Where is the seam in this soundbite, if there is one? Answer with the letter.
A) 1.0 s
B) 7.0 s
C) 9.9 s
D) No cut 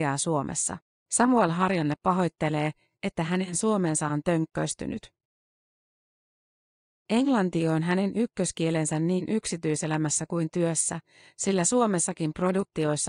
A